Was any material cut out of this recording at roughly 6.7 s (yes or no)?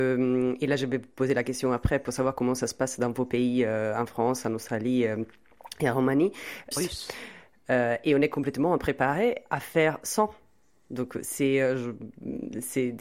yes